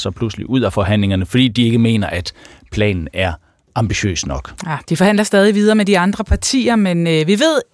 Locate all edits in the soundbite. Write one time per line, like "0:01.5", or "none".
none